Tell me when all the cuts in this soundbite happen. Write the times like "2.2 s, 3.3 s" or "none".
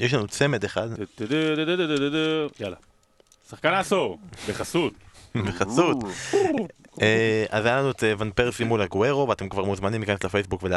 none